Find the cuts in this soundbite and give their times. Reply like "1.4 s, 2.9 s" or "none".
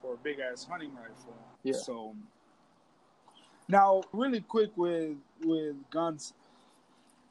1.6 s, 4.1 s